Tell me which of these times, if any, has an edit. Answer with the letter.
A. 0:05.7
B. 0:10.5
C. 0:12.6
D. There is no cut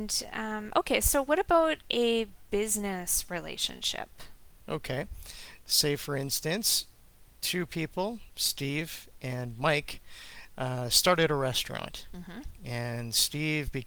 D